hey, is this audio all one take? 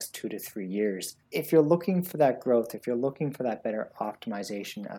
no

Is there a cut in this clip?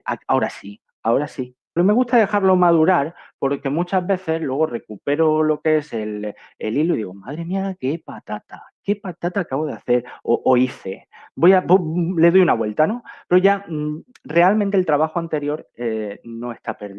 yes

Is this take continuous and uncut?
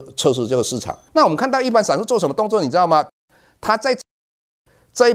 no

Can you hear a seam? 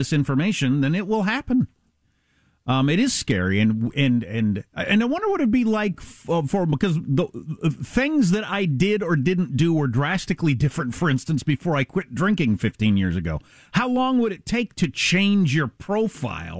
no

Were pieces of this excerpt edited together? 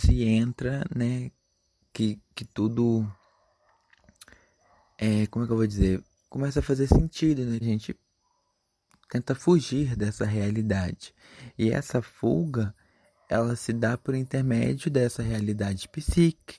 yes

